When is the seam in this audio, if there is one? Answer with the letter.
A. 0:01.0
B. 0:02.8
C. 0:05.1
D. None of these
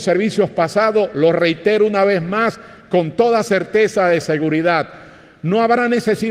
D